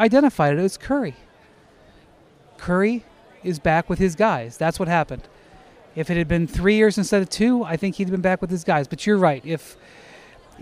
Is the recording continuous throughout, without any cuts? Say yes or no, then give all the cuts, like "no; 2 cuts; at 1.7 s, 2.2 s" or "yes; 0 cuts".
yes; 0 cuts